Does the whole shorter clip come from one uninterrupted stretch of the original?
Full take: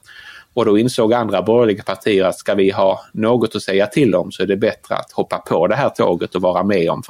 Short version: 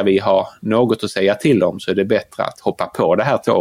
yes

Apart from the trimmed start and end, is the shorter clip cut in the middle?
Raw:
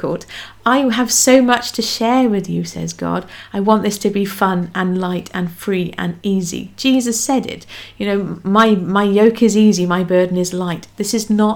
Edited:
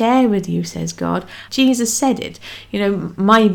yes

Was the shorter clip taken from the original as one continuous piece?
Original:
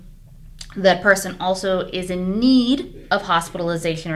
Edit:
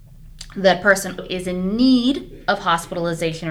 no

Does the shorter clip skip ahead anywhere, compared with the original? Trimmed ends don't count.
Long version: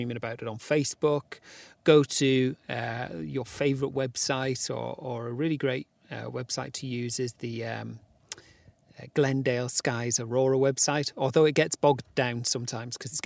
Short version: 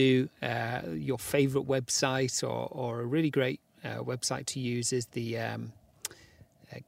no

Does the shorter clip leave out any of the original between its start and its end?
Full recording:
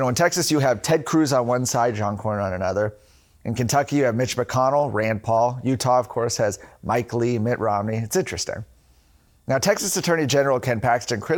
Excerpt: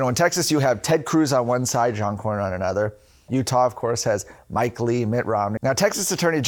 yes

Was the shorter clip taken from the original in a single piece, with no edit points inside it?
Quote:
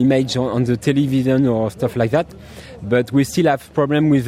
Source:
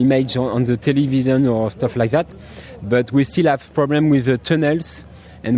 yes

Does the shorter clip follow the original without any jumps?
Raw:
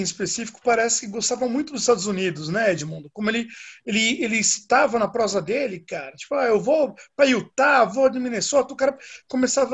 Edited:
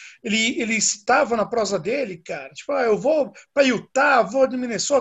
yes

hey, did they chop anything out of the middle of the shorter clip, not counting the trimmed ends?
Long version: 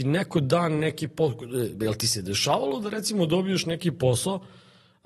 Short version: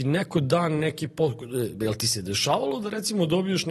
no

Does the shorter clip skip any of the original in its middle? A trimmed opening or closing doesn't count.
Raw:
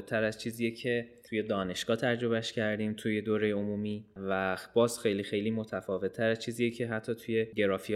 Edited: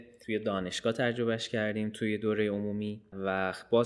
no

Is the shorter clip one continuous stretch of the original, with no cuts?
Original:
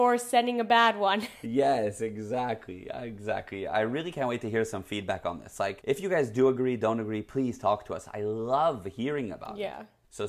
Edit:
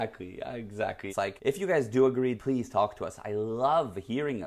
no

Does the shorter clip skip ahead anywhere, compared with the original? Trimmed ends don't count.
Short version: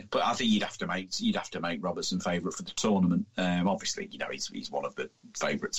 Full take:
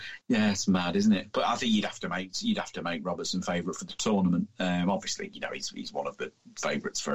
no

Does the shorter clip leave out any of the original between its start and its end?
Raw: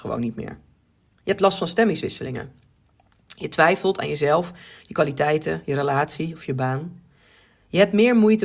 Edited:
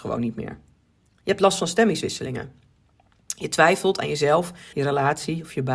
yes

